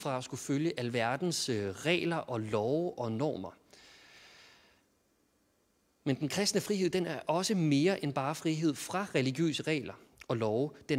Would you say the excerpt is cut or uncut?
uncut